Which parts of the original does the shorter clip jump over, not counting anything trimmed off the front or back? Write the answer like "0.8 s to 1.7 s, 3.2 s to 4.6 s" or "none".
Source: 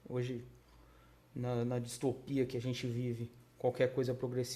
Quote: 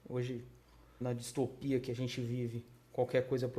1.0 s to 1.7 s